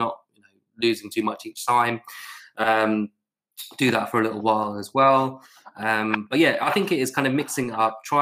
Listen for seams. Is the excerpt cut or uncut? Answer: uncut